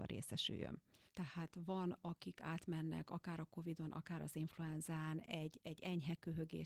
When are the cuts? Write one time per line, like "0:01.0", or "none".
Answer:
0:01.1